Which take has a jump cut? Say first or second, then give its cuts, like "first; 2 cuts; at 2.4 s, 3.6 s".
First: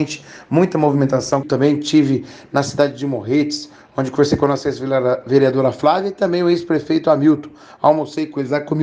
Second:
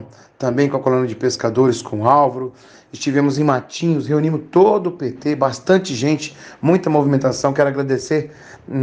first; 1 cut; at 1.4 s